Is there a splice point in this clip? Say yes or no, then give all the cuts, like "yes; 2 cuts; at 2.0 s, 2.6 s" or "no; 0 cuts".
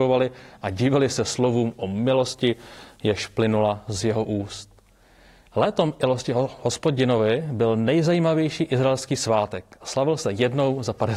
no; 0 cuts